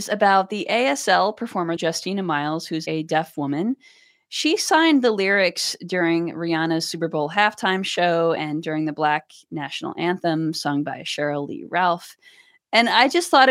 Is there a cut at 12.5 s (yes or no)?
no